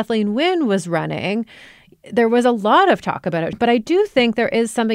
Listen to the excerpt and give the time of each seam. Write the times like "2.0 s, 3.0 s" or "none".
3.5 s